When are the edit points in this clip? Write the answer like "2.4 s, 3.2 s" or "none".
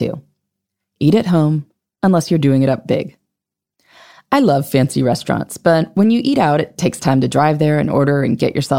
none